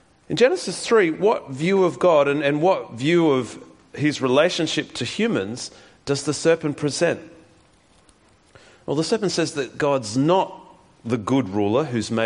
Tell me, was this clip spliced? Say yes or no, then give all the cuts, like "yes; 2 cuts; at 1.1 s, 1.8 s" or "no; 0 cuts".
no; 0 cuts